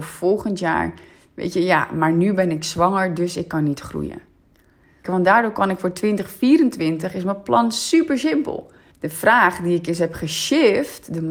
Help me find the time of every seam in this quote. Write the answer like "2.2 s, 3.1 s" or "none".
5.0 s, 8.9 s